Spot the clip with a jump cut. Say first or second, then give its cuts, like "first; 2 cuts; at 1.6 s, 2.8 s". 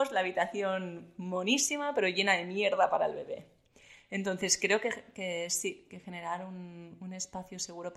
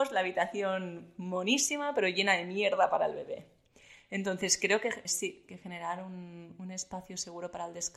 second; 1 cut; at 5.1 s